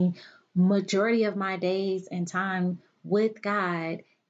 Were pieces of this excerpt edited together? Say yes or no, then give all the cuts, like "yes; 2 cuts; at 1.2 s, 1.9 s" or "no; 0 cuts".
no; 0 cuts